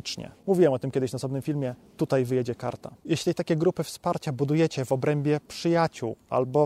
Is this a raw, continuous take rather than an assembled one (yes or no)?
no